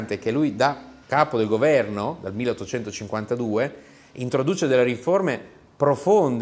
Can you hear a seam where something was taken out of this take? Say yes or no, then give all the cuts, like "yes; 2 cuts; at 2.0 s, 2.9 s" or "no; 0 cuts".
yes; 1 cut; at 1.0 s